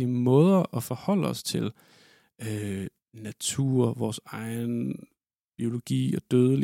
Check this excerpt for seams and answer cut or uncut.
uncut